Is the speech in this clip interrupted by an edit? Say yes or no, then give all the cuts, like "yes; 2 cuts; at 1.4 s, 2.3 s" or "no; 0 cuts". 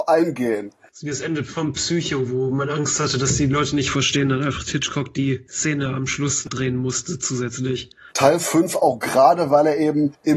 yes; 1 cut; at 8.1 s